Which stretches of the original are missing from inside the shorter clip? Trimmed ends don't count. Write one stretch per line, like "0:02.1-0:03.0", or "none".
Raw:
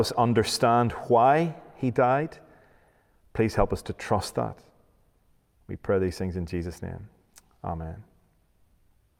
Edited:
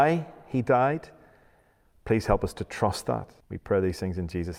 0:04.7-0:05.6